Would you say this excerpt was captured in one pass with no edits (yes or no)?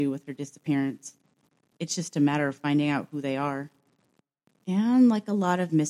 yes